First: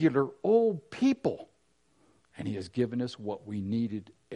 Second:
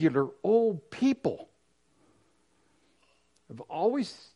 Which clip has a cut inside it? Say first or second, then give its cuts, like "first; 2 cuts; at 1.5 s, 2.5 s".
first; 1 cut; at 2.2 s